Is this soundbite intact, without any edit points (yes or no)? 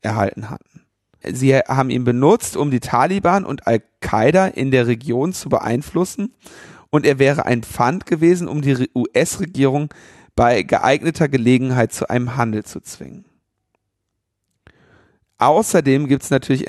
no